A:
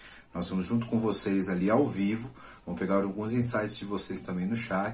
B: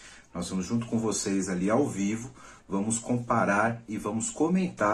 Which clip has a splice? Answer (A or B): B